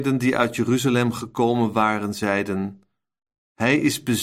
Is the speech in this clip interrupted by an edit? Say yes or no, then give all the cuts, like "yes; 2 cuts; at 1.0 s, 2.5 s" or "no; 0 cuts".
no; 0 cuts